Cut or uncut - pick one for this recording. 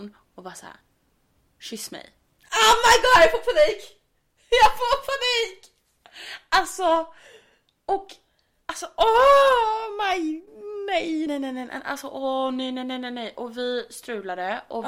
cut